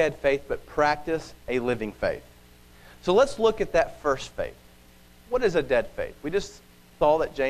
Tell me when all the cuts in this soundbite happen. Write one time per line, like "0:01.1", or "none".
none